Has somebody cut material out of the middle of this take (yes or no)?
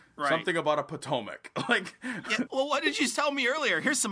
yes